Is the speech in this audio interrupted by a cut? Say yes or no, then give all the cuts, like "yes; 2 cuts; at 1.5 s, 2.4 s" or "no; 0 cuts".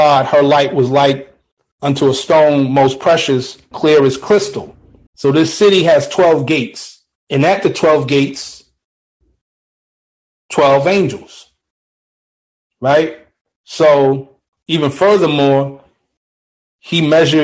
yes; 3 cuts; at 3.7 s, 5.1 s, 14.6 s